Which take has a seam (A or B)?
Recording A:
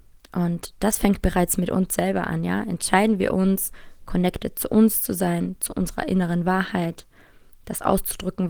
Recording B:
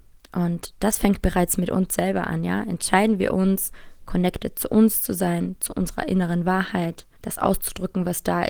B